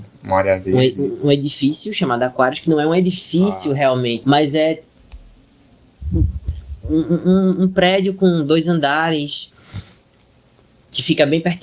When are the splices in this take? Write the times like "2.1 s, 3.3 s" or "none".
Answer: 4.2 s